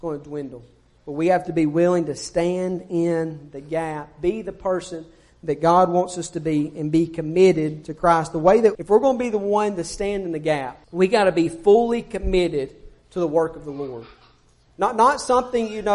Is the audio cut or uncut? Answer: cut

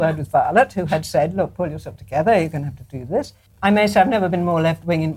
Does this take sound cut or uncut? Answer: cut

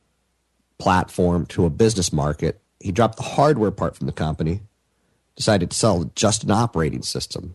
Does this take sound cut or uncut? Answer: uncut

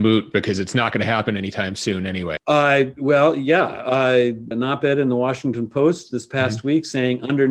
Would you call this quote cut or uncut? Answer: cut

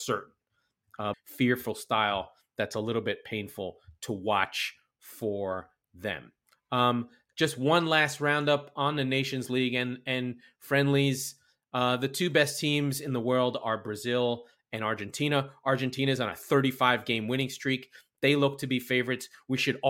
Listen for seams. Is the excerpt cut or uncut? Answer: cut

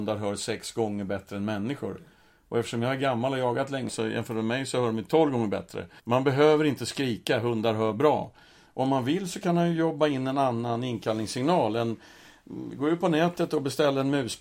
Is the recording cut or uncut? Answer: cut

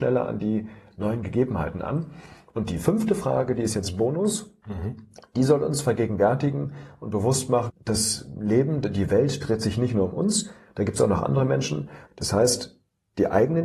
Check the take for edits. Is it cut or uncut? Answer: cut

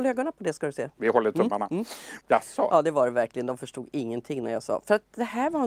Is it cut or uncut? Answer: cut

